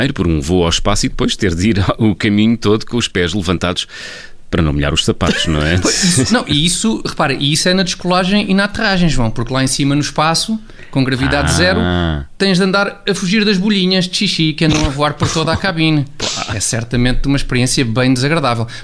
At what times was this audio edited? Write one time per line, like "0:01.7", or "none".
none